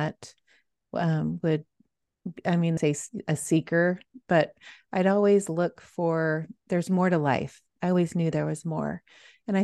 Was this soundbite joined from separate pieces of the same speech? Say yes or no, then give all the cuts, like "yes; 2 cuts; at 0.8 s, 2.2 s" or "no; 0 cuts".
yes; 1 cut; at 2.8 s